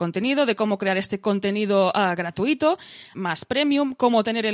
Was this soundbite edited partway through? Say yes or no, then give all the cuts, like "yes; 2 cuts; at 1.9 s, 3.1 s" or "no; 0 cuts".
yes; 1 cut; at 3.1 s